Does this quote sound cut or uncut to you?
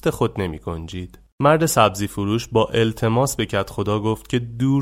uncut